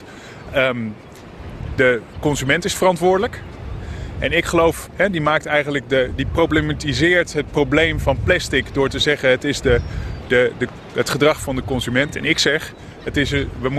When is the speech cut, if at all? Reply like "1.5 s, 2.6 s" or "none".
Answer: none